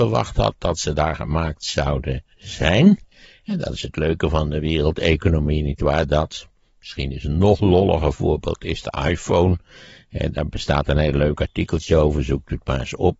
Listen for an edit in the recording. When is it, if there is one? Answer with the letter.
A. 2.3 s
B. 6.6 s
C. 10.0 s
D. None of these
A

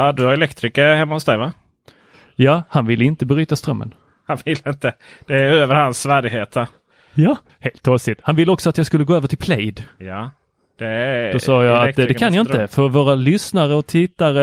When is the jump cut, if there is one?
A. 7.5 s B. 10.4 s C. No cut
A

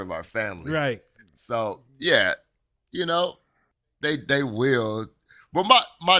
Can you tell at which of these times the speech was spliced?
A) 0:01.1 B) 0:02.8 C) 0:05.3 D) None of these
D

